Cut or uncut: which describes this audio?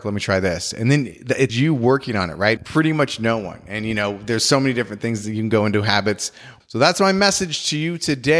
cut